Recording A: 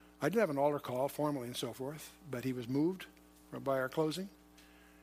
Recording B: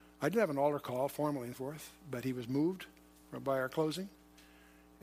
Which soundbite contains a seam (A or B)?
B